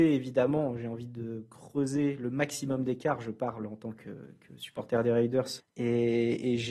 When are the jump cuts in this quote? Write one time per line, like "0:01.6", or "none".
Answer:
0:05.6